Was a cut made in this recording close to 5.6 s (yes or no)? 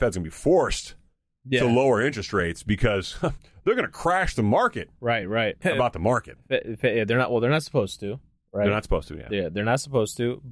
yes